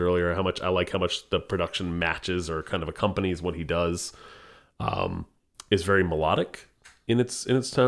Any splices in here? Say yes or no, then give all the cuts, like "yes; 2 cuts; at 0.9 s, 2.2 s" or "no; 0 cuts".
no; 0 cuts